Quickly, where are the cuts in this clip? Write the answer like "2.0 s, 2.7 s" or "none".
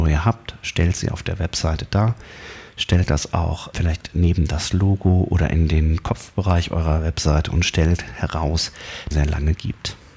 3.7 s, 9.1 s